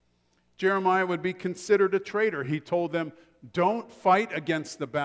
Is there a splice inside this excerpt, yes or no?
no